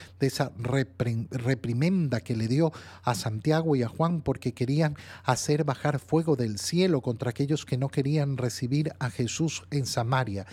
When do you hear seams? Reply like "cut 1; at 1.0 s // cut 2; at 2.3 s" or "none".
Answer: none